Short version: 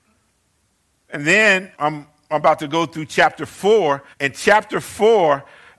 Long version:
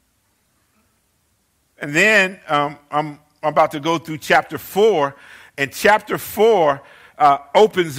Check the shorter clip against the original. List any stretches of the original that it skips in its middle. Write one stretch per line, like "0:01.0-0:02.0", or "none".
0:02.4-0:02.9
0:05.2-0:05.5